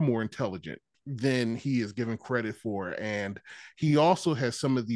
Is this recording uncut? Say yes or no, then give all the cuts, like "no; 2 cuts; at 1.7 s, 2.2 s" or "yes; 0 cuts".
yes; 0 cuts